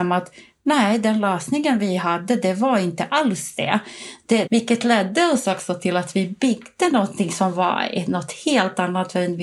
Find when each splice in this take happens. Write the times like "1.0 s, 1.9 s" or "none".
4.5 s